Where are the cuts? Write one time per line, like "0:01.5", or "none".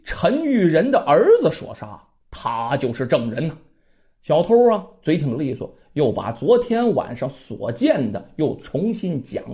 none